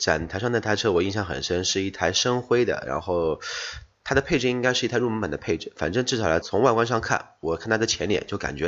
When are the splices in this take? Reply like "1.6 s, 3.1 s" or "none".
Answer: 6.4 s